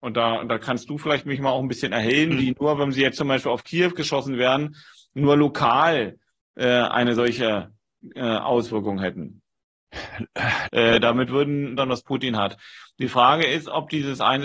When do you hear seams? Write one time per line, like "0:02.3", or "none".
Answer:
0:10.6
0:11.8